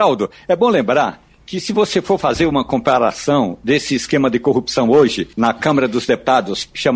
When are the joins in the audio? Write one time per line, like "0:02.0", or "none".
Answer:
0:05.3

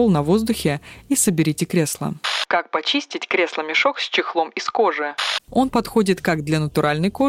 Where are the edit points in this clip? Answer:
0:05.5

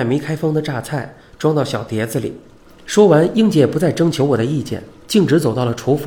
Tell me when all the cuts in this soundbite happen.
0:02.7

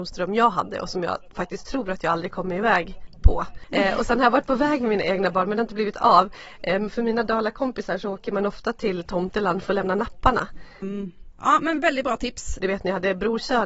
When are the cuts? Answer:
0:10.8
0:12.6

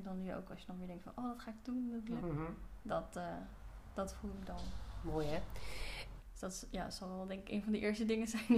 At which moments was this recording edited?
0:02.2
0:06.2

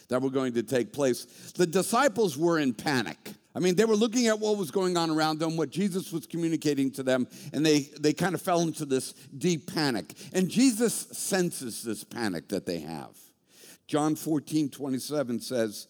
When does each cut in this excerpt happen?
0:03.4
0:13.8

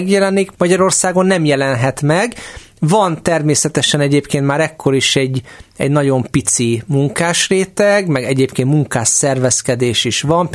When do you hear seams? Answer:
none

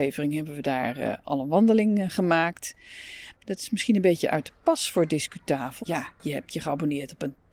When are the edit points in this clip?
0:03.3
0:05.8

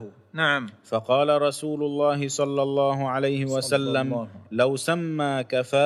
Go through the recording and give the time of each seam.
none

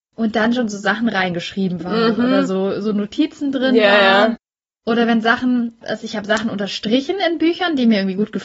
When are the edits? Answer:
0:05.8

